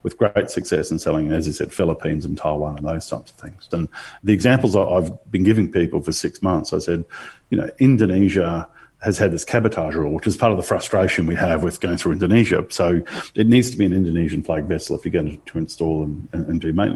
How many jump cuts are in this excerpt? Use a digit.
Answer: 1